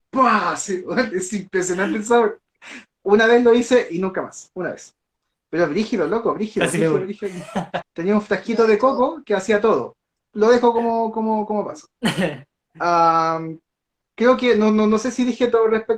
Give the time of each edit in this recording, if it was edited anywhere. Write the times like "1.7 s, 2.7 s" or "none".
7.8 s, 10.1 s